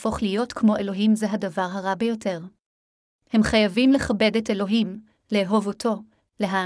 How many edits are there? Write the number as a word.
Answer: one